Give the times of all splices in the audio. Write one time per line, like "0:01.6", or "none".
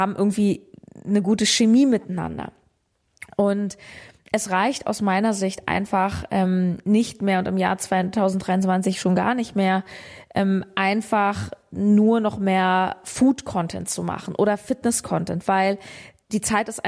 none